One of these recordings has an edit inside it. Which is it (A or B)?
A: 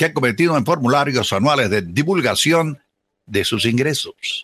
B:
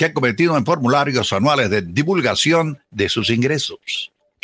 B